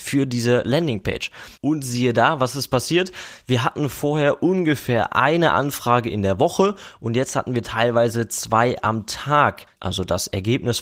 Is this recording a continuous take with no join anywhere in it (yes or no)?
no